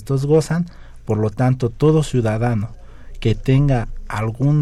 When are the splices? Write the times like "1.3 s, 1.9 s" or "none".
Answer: none